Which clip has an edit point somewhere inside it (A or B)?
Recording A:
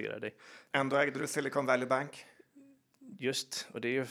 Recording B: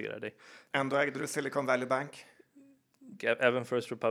B